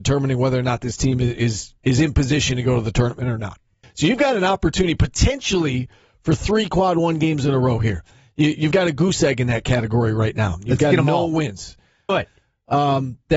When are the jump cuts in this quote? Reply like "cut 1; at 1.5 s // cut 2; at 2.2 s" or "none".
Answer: cut 1; at 3.8 s // cut 2; at 12.1 s